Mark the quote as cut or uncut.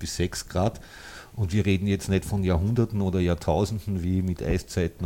uncut